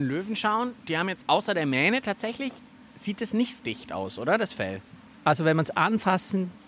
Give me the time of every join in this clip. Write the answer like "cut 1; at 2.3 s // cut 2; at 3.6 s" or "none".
cut 1; at 3.6 s